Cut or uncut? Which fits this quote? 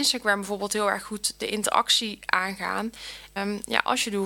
cut